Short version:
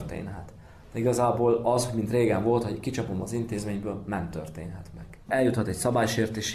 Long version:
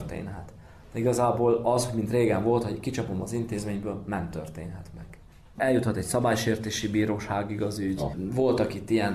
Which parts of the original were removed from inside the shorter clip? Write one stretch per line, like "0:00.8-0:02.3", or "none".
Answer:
0:05.2-0:05.5